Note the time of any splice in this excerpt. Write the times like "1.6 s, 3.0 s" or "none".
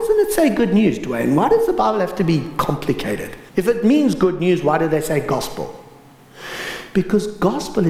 3.5 s